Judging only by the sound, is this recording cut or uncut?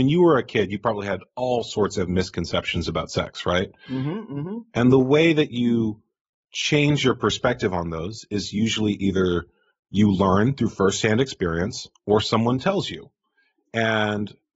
uncut